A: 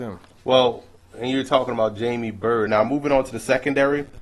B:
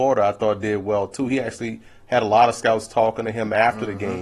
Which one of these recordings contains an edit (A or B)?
A